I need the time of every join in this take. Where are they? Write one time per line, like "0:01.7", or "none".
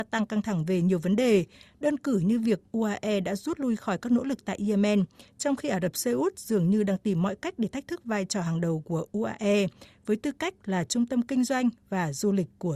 none